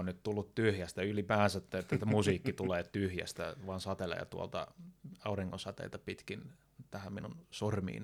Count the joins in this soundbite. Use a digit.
0